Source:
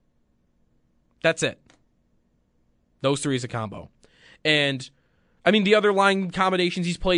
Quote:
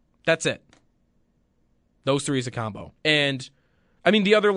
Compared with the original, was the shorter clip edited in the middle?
yes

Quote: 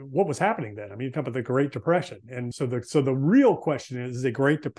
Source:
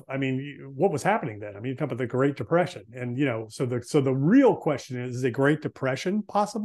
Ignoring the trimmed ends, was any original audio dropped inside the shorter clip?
yes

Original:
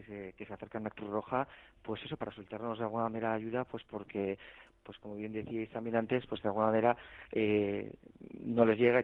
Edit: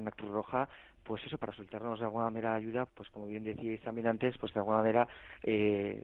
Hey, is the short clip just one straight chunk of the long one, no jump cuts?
no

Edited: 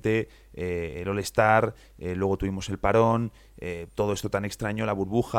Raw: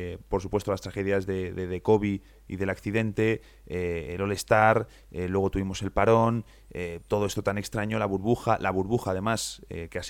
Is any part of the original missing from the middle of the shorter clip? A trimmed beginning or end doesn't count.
no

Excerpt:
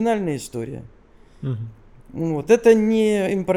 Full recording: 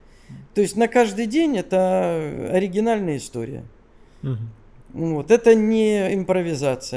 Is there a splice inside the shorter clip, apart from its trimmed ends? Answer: no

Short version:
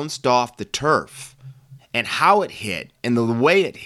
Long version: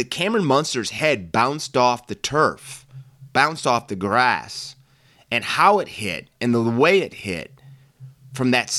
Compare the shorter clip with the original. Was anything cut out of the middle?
yes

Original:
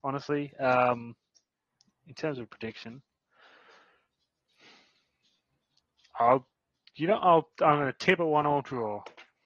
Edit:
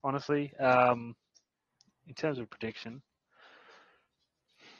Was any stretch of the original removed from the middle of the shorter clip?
no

